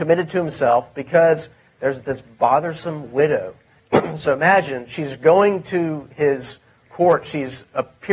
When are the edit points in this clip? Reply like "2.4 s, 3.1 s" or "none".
3.8 s